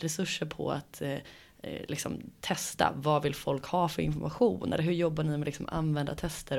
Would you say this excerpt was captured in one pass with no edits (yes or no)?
yes